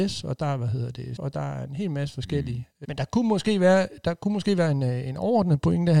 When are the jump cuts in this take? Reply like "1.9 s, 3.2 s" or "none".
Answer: 1.2 s, 2.8 s